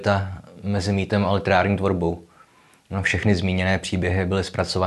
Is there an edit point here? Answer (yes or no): no